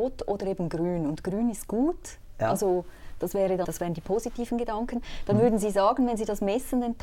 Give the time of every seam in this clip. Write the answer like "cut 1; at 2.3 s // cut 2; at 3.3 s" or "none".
cut 1; at 3.6 s